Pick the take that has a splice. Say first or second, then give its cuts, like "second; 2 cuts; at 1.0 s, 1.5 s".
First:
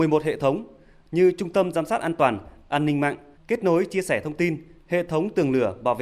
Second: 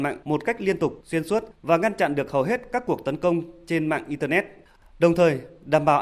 first; 1 cut; at 3.4 s